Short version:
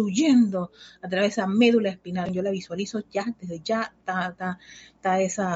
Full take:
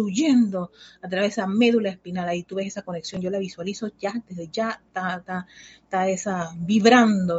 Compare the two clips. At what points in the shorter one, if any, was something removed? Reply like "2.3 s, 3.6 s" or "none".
2.2 s